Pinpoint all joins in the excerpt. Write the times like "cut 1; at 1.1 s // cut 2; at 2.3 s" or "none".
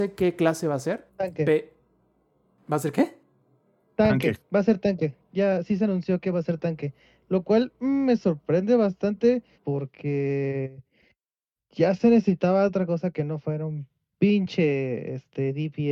cut 1; at 1.1 s // cut 2; at 9.5 s